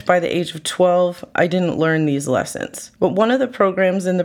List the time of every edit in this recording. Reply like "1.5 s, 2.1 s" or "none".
3.0 s